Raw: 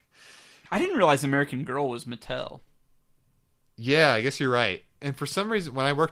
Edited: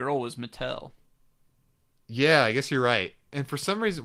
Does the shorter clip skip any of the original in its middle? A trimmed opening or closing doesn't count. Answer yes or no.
no